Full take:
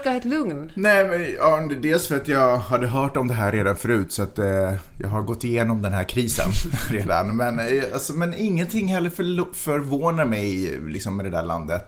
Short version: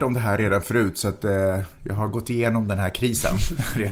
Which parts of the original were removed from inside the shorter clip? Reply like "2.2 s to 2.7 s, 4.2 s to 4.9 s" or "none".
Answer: none

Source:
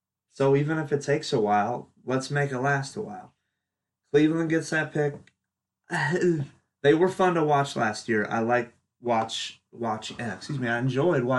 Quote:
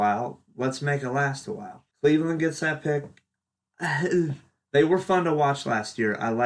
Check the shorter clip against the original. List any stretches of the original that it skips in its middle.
3.4 s to 4.0 s

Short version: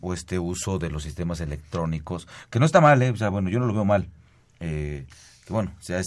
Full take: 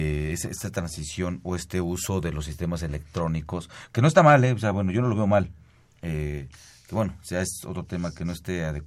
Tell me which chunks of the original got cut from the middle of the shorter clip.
none

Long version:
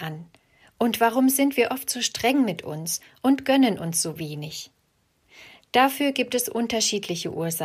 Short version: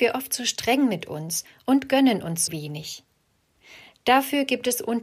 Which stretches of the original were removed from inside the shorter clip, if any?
4.0 s to 4.1 s

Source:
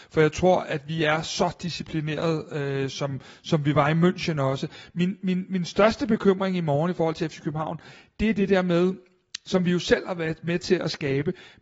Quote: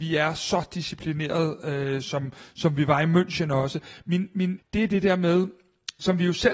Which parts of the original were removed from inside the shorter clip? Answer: 5.5 s to 8.0 s

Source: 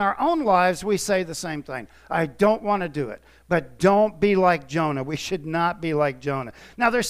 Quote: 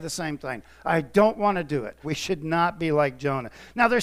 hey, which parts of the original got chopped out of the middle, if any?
3.3 s to 5.0 s

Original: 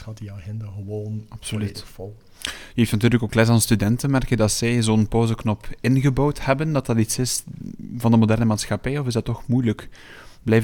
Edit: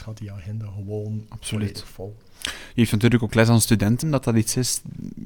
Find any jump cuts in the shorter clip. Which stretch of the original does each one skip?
4.0 s to 6.6 s

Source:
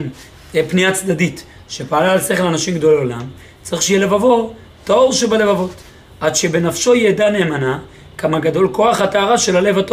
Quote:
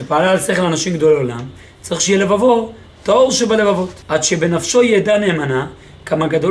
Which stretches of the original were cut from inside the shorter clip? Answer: 5.8 s to 6.1 s

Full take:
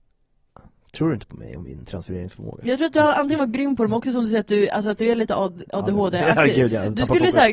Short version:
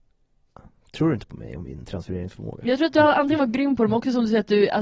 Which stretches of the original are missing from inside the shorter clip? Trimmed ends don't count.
none

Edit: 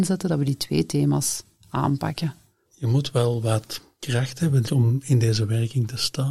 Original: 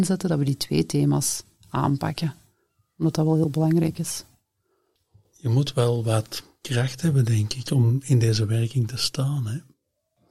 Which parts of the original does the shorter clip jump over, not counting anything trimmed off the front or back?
2.6 s to 5.3 s, 7.3 s to 7.6 s

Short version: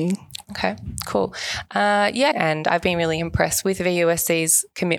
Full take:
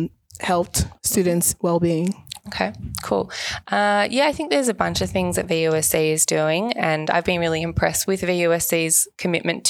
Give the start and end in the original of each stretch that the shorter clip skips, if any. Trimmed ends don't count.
4.3 s to 6.7 s

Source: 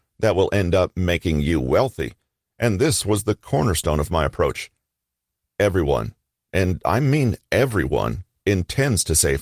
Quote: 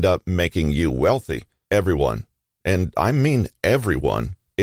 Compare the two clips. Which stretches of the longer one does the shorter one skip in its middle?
2.3 s to 5.5 s

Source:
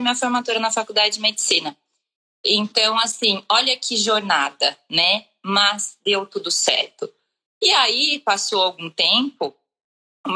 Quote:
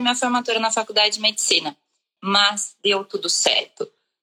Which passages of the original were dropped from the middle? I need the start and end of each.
2.2 s to 5.4 s

